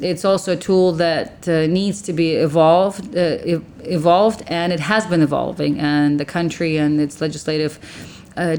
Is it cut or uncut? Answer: uncut